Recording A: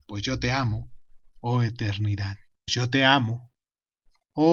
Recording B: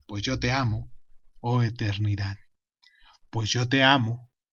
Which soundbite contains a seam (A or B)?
A